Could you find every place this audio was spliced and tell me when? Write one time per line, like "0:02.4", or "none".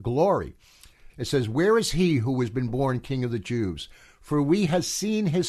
0:01.1